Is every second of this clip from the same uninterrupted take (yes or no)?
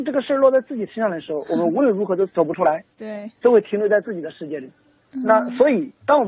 yes